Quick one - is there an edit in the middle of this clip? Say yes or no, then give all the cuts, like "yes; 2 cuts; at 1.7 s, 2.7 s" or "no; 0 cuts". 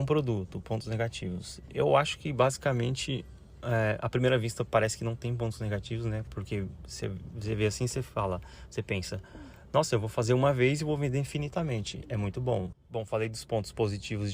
yes; 1 cut; at 12.7 s